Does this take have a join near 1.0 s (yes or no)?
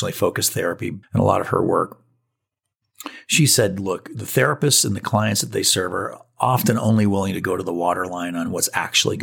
yes